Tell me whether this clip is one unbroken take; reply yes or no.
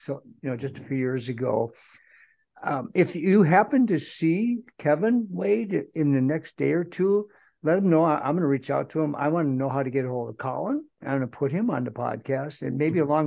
yes